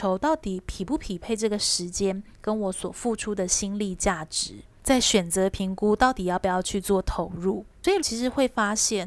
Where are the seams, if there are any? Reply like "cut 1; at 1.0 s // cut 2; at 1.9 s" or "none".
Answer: cut 1; at 8.0 s